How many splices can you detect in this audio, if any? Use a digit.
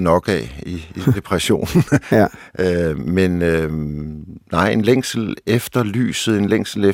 0